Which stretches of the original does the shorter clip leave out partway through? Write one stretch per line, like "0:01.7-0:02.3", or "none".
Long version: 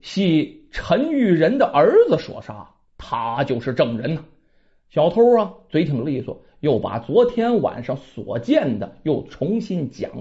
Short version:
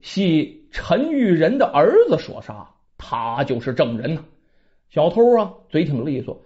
none